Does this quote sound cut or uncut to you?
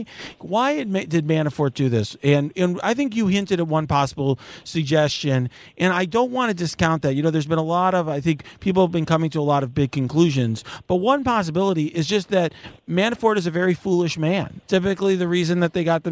cut